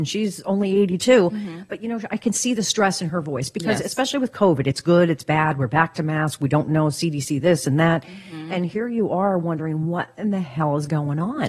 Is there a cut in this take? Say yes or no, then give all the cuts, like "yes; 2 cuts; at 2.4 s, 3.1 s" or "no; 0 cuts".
no; 0 cuts